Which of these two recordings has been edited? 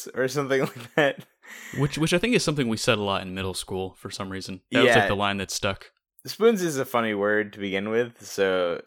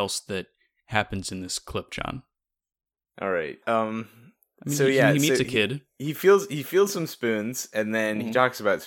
second; 1 cut; at 3.6 s

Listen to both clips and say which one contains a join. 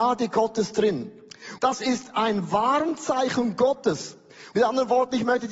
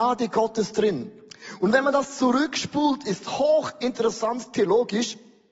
first; 2 cuts; at 1.6 s, 4.5 s

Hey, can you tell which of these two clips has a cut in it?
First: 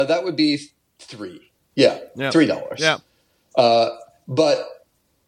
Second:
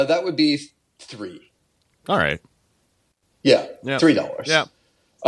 first; 1 cut; at 1.7 s

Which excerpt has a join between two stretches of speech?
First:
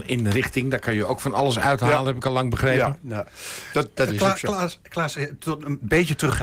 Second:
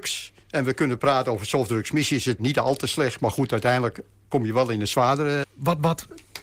second; 2 cuts; at 2.4 s, 5.4 s

